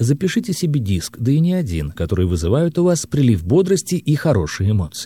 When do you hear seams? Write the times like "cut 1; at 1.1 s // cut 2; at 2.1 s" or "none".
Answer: cut 1; at 2.0 s